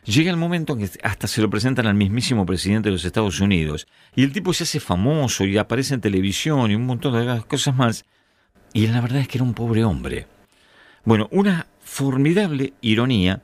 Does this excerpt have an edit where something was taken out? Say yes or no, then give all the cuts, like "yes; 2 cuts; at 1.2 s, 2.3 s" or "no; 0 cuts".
no; 0 cuts